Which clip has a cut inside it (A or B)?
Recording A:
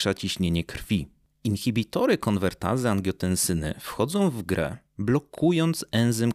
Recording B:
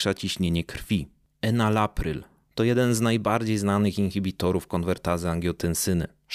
B